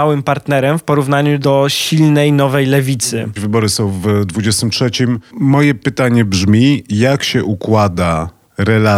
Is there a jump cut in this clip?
yes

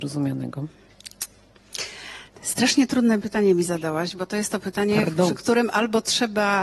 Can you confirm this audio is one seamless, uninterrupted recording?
yes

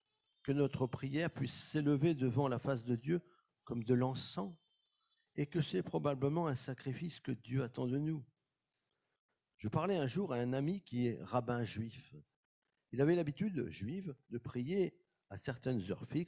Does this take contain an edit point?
no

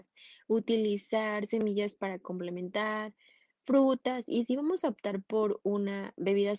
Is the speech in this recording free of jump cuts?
yes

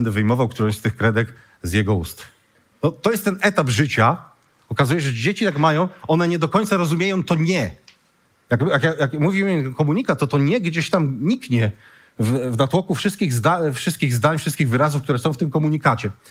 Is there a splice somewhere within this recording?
no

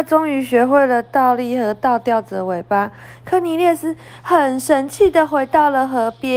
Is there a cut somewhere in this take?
no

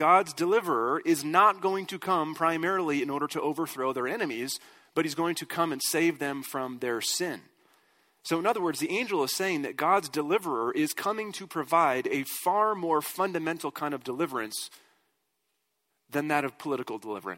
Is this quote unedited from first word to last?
yes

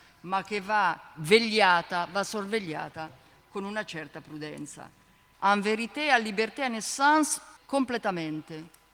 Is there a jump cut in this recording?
yes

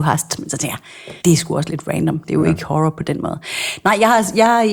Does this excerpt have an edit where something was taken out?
yes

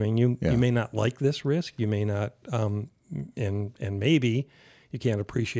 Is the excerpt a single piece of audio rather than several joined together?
yes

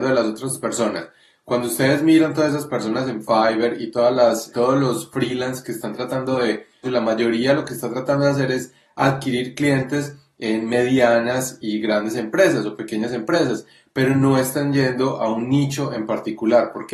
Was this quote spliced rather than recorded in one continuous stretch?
yes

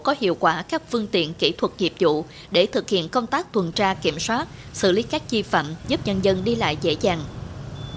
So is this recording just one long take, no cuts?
no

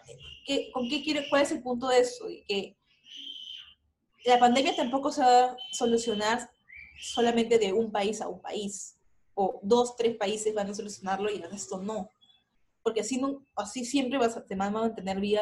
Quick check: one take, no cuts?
yes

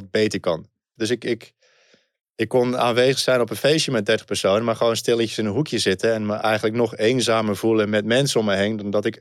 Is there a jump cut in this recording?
yes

